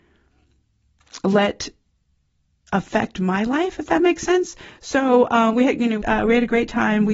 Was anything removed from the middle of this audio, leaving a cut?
yes; 1 cut; at 6.0 s

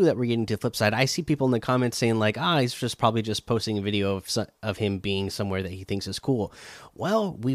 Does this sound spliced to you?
no; 0 cuts

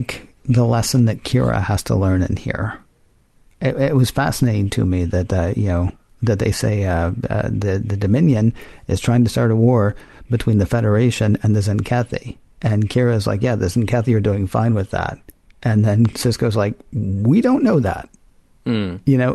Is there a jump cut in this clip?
no; 0 cuts

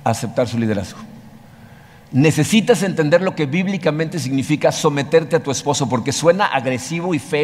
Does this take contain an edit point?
no; 0 cuts

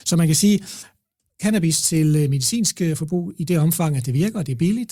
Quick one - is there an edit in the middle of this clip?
no; 0 cuts

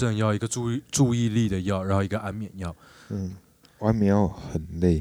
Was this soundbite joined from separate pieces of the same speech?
yes; 1 cut; at 3.6 s

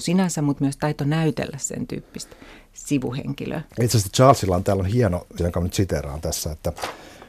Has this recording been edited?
yes; 2 cuts; at 3.7 s, 5.4 s

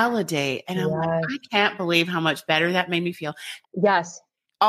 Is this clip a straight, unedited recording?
no; 1 cut; at 3.6 s

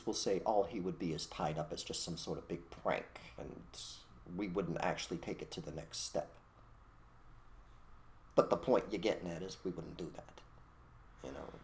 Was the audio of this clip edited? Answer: yes; 2 cuts; at 3.4 s, 8.3 s

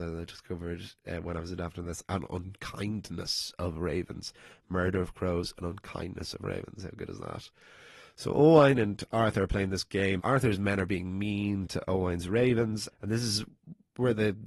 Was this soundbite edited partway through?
yes; 2 cuts; at 10.2 s, 12.9 s

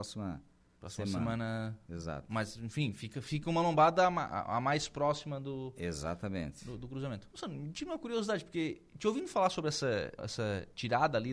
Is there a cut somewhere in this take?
yes; 2 cuts; at 7.3 s, 10.2 s

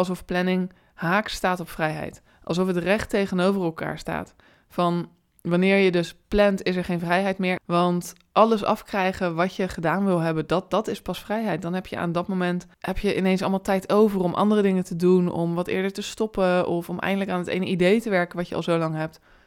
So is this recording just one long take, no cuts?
no; 2 cuts; at 7.6 s, 12.7 s

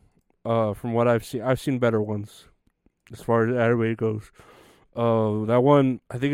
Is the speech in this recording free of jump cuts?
yes; 0 cuts

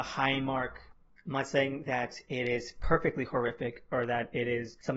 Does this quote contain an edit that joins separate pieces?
no; 0 cuts

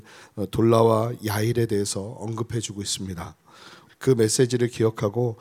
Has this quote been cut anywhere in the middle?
yes; 1 cut; at 3.9 s

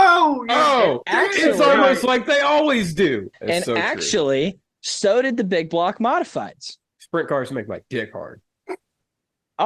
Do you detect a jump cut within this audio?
yes; 1 cut; at 3.3 s

